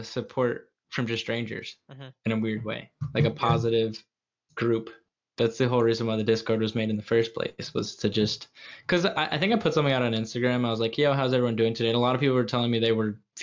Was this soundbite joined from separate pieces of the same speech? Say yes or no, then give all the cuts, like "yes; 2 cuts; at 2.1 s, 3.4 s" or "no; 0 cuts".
no; 0 cuts